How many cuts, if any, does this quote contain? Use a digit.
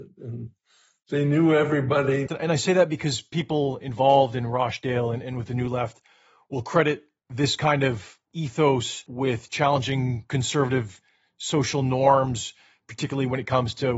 1